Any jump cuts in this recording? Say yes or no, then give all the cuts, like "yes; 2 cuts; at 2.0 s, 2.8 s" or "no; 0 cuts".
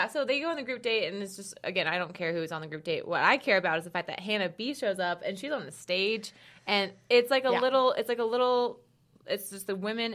no; 0 cuts